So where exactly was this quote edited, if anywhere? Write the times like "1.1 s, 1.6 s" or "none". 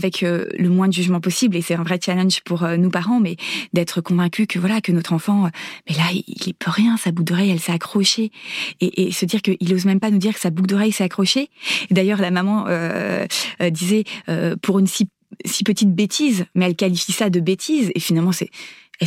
none